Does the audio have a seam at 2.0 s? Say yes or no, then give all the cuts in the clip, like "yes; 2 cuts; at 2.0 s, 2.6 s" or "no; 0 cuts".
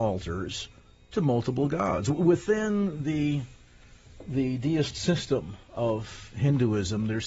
no; 0 cuts